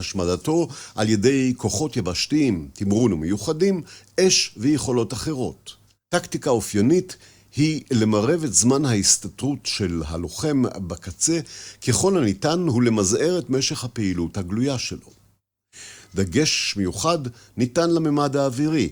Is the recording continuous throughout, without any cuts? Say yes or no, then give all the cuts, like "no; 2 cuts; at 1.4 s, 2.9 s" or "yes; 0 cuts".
no; 1 cut; at 6.0 s